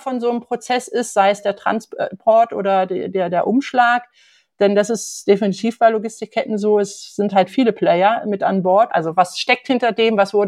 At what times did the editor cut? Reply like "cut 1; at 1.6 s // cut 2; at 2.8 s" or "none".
cut 1; at 8.9 s